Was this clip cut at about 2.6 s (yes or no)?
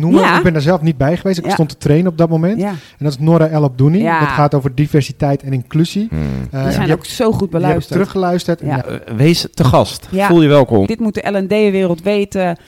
no